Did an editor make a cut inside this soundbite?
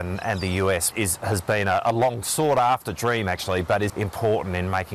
yes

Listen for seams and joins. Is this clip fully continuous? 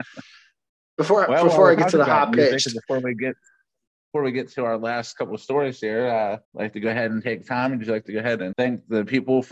no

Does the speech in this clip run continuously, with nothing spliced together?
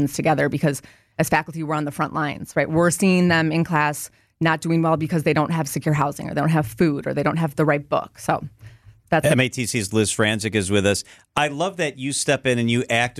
yes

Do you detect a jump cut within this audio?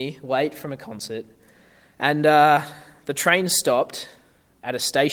no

